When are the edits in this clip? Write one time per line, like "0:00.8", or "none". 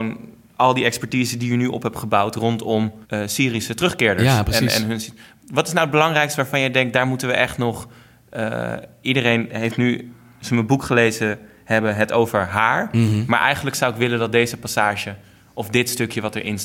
0:03.0